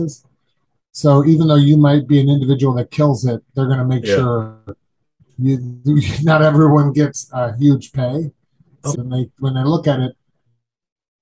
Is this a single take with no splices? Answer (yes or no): no